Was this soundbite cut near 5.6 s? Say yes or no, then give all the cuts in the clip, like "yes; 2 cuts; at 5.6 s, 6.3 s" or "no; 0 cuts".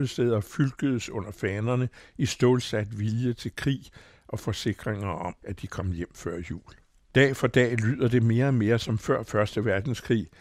no; 1 cut; at 7.0 s